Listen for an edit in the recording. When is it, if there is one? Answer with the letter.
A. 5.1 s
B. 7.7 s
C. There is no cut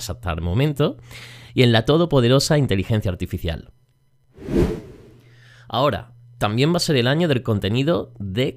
C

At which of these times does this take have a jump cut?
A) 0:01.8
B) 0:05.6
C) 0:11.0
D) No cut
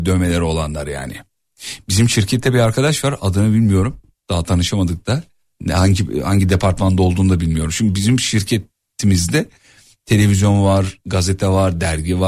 D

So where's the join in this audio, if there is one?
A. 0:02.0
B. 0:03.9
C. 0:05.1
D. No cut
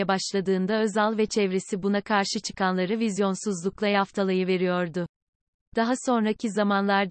D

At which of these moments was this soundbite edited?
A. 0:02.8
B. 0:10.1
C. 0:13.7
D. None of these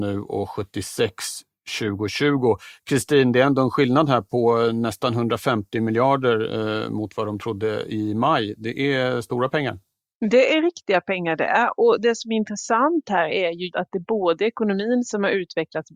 C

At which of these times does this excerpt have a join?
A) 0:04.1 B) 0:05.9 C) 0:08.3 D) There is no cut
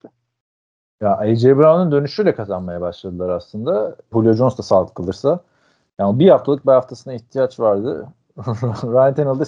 A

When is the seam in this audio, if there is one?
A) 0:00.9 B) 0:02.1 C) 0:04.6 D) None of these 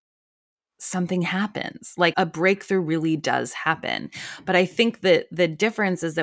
B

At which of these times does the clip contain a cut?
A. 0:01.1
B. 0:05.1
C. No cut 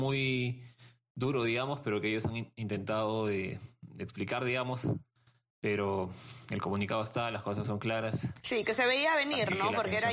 C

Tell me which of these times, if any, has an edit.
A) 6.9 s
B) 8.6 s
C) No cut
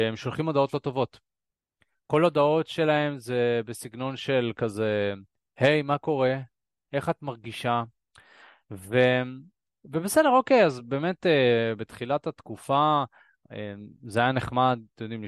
A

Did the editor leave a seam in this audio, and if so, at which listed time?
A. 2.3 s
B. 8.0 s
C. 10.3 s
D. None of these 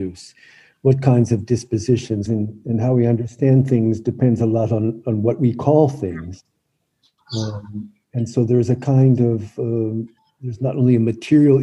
A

